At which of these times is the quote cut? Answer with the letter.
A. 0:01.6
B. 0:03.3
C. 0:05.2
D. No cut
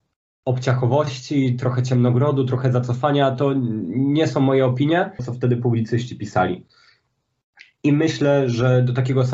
C